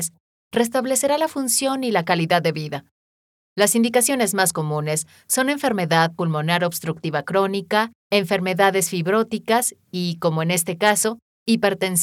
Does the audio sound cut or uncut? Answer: cut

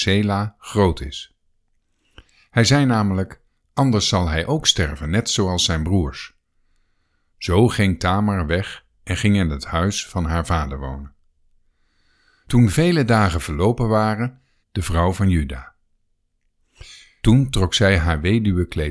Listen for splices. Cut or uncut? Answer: cut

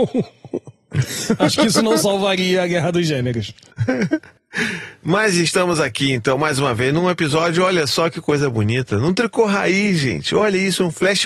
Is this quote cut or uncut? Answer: uncut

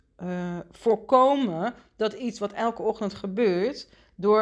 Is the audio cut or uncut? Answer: uncut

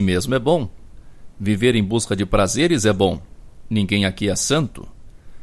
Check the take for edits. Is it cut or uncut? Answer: uncut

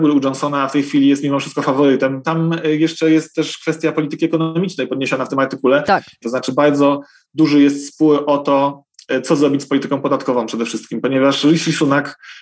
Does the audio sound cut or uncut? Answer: cut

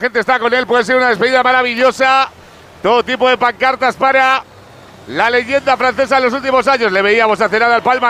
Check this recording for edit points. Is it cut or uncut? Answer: uncut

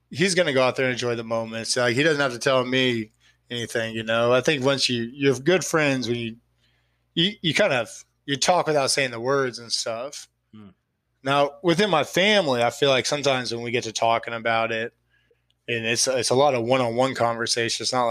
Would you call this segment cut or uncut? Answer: uncut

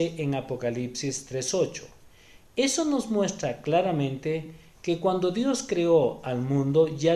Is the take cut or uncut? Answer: uncut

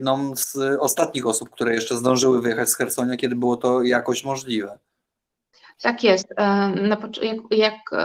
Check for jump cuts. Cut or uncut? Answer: uncut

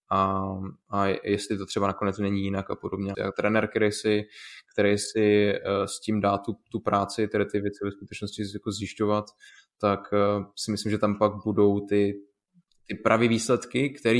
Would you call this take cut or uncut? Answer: cut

